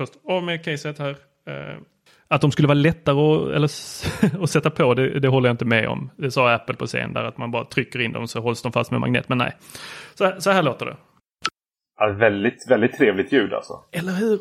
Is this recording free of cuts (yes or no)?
yes